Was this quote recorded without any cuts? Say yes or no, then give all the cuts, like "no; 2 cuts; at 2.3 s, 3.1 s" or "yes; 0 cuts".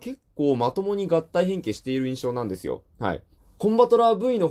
no; 1 cut; at 3.4 s